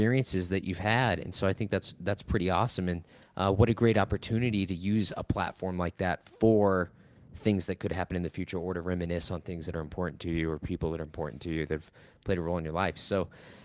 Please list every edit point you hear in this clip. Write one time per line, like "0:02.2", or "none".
none